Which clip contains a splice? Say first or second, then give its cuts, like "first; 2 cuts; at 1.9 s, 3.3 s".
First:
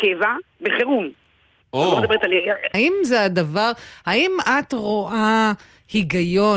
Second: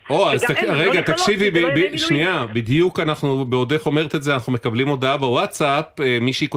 first; 1 cut; at 2.7 s